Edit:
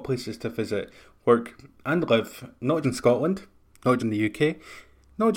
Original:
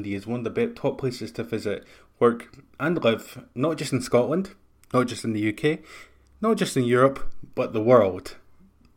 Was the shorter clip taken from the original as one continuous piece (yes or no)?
no